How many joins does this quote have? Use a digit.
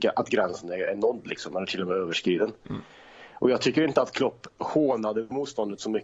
0